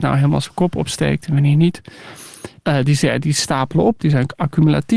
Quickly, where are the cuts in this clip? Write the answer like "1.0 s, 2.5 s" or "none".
2.6 s